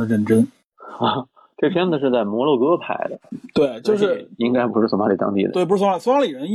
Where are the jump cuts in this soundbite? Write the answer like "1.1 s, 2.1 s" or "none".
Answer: none